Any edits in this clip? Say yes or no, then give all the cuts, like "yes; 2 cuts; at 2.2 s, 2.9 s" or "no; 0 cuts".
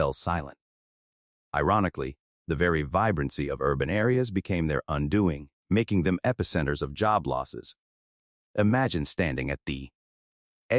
yes; 1 cut; at 8.4 s